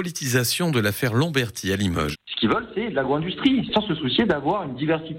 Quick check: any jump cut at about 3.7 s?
no; 1 cut; at 2.1 s

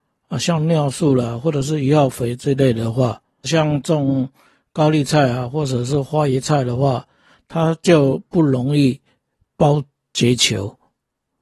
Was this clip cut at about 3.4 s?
yes; 1 cut; at 3.4 s

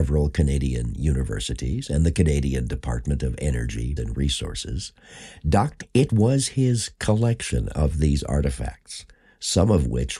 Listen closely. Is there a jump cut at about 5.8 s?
yes; 2 cuts; at 4.0 s, 5.8 s

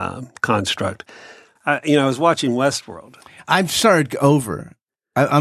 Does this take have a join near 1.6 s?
yes; 1 cut; at 1.6 s

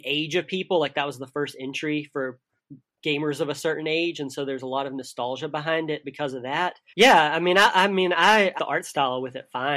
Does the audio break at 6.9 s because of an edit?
yes; 2 cuts; at 6.9 s, 8.6 s

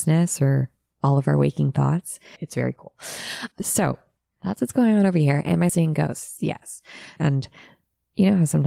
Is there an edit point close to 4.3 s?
no; 3 cuts; at 2.4 s, 5.7 s, 7.2 s

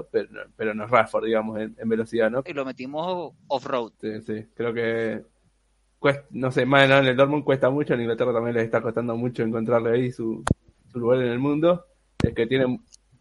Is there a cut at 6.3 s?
no; 2 cuts; at 2.5 s, 3.9 s

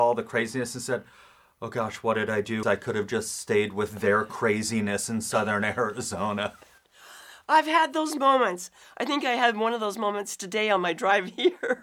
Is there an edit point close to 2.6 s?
yes; 1 cut; at 2.6 s

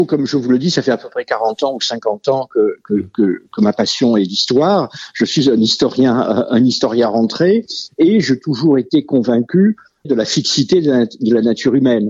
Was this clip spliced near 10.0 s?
yes; 1 cut; at 10.0 s

